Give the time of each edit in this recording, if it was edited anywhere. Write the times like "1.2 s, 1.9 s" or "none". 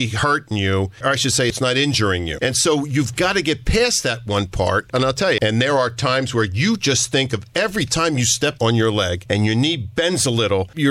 1.5 s, 5.4 s